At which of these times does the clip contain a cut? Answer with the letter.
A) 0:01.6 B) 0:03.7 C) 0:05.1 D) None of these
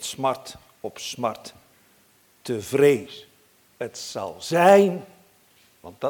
B